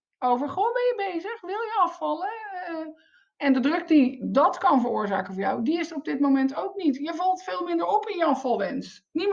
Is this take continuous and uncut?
yes; 0 cuts

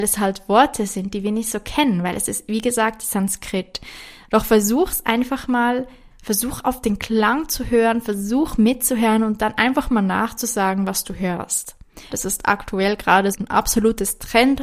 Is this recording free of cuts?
no; 2 cuts; at 12.1 s, 13.3 s

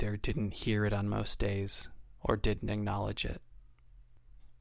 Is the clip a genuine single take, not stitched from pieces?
yes; 0 cuts

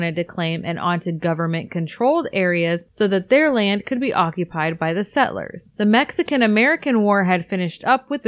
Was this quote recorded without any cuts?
yes; 0 cuts

